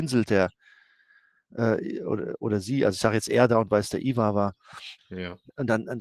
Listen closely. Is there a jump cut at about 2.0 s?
no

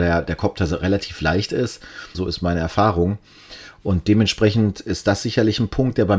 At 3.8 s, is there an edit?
no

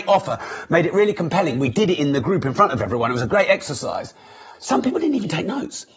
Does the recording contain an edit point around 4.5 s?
yes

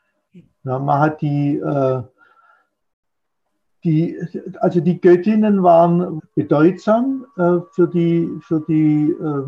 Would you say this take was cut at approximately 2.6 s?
no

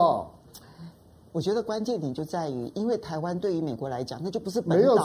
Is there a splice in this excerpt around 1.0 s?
no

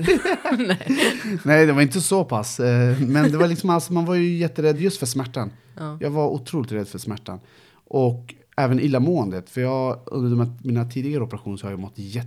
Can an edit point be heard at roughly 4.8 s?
no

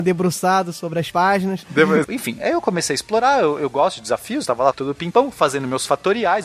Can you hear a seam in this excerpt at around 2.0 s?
yes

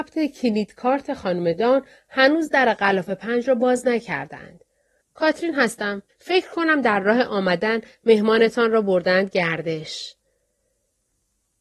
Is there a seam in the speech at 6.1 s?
yes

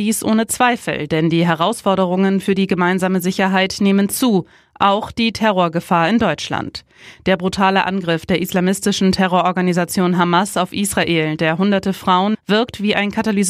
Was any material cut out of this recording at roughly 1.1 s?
no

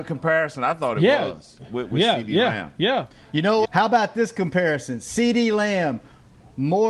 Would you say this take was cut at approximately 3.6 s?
yes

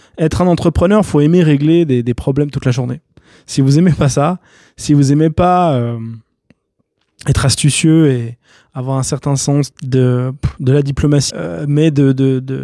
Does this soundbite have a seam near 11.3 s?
yes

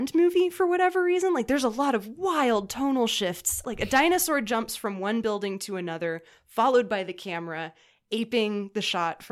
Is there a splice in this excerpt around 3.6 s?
yes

